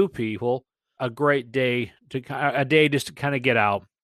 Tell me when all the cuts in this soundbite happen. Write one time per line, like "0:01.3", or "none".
0:01.0